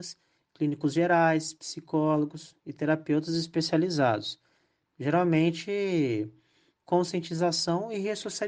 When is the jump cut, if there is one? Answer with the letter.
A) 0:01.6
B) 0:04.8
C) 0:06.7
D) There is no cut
C